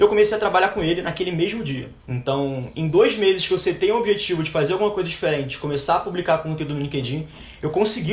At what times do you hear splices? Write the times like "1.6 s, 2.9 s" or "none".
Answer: 2.0 s

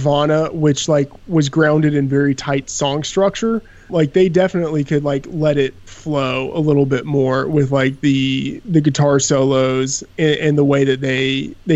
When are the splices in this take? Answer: 3.9 s

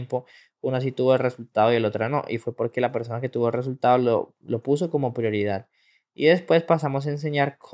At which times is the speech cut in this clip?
none

